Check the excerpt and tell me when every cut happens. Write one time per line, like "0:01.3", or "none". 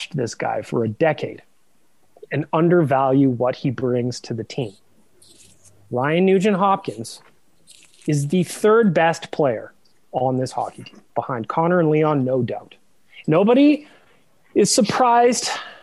0:11.1
0:13.2